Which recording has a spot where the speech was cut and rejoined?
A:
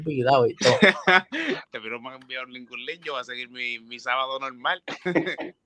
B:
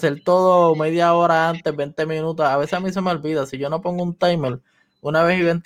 A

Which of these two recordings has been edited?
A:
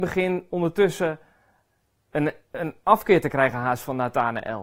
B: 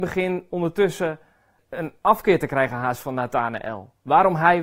B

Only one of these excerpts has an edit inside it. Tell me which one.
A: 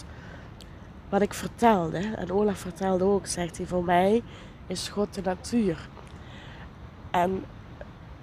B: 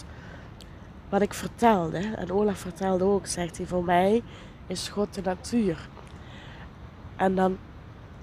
B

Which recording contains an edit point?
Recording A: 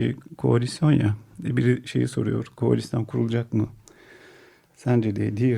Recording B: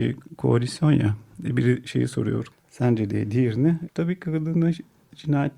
B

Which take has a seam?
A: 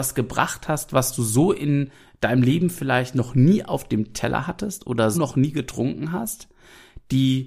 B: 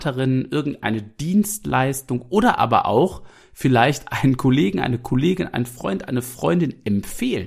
A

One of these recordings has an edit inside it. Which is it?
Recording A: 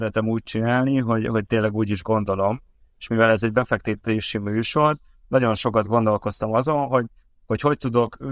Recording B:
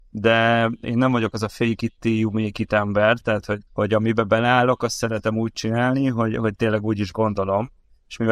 B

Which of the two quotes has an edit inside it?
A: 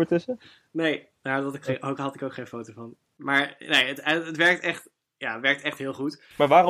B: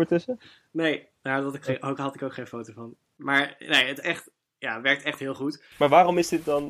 B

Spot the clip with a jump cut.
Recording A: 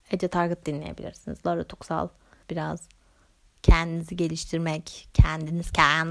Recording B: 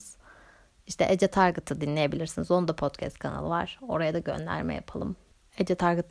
A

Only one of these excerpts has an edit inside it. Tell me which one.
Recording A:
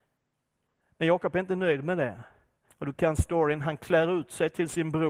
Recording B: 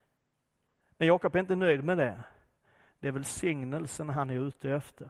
A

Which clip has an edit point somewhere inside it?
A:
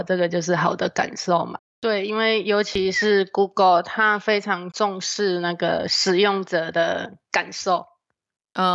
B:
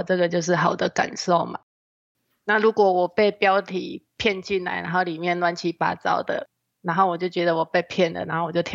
A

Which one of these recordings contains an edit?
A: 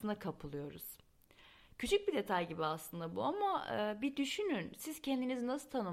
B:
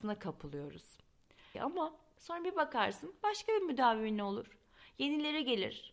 B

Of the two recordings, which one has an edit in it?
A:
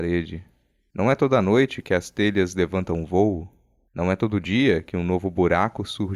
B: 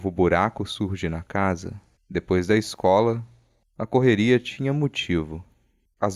B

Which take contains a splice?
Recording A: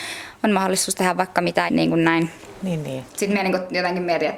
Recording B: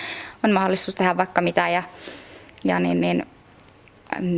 A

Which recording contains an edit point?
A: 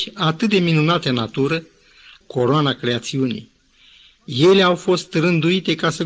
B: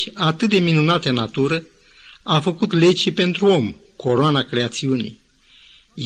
A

